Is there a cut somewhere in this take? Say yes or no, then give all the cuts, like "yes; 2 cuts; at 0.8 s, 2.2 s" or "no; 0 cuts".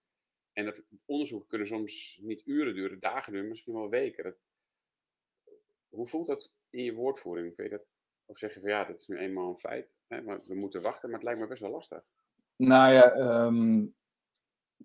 no; 0 cuts